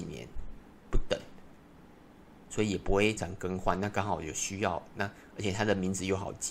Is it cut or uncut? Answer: cut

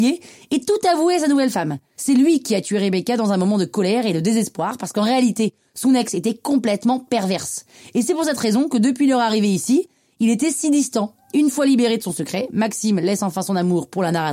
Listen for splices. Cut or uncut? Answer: uncut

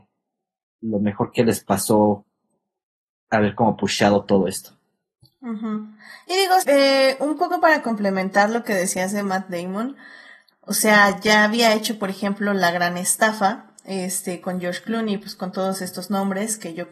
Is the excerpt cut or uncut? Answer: cut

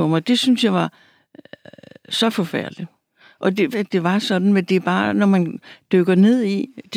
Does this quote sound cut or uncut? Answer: cut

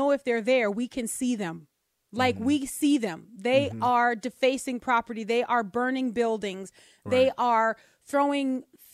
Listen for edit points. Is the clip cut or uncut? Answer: uncut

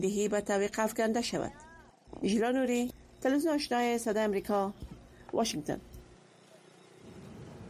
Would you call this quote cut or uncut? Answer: uncut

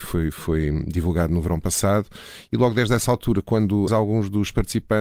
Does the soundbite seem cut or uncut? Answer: cut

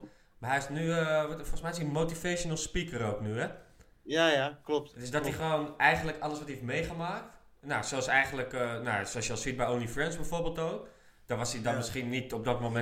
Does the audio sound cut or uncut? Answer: uncut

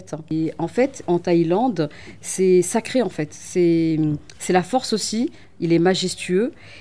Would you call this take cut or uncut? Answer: cut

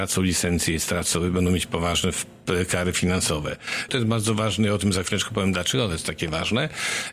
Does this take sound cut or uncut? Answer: cut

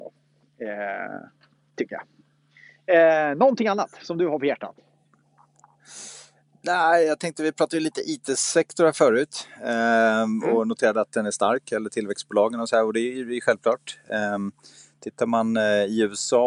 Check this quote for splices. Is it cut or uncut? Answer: uncut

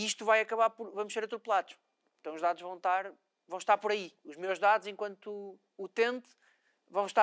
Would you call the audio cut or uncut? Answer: cut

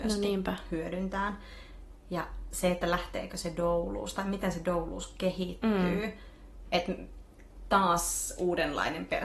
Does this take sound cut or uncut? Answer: cut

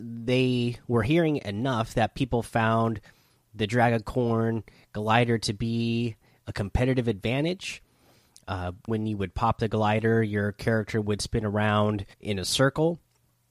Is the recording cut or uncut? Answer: cut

